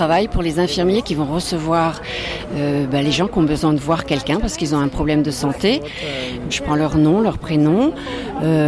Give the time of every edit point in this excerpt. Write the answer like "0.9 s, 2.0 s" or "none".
6.5 s